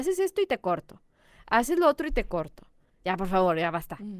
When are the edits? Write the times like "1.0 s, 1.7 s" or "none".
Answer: 2.9 s